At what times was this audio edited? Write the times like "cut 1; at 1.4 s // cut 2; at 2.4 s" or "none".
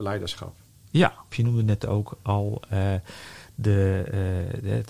cut 1; at 1.3 s